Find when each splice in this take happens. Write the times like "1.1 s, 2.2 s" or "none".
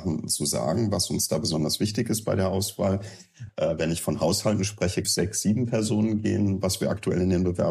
3.5 s, 5.0 s